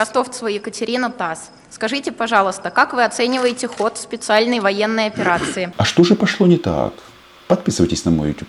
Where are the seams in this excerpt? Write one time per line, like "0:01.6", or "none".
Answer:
0:05.8